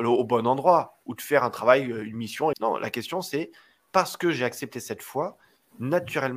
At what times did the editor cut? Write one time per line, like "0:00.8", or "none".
0:02.5